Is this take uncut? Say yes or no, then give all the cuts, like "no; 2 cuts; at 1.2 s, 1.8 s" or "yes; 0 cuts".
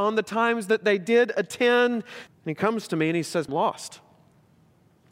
no; 2 cuts; at 2.3 s, 3.5 s